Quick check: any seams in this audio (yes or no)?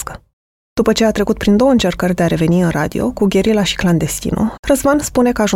yes